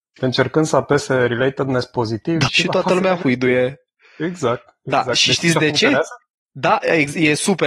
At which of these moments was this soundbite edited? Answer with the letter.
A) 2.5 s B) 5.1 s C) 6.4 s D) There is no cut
A